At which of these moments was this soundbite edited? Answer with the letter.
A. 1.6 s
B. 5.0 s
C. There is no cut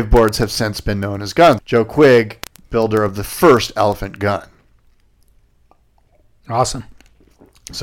A